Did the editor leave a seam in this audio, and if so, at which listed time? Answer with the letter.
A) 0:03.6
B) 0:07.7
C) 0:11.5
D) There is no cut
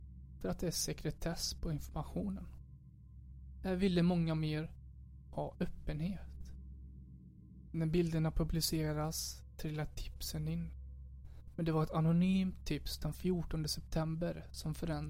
B